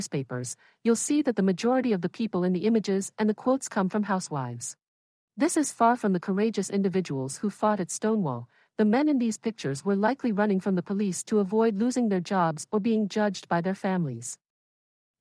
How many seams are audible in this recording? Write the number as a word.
one